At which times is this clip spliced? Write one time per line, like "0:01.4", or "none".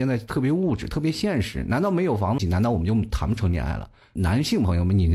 0:02.4